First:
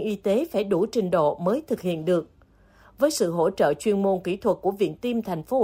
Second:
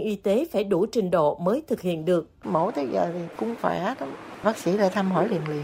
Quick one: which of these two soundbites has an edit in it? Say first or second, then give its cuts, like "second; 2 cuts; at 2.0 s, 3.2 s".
second; 1 cut; at 2.4 s